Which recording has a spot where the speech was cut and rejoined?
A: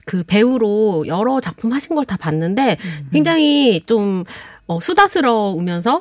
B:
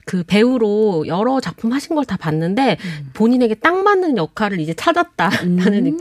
A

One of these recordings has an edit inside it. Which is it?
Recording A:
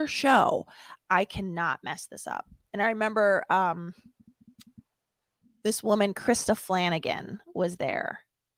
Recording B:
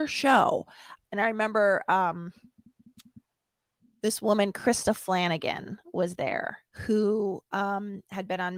B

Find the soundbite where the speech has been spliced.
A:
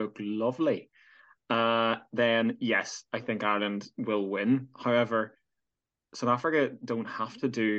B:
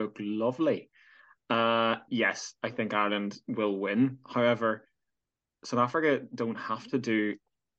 B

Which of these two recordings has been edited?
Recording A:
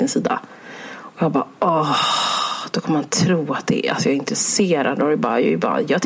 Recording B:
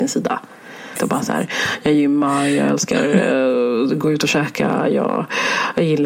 B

